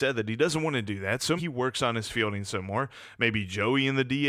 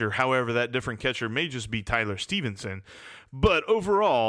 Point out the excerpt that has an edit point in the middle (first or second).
first